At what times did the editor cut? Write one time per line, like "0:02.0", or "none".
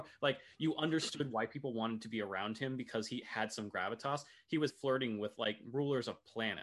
0:03.2
0:04.7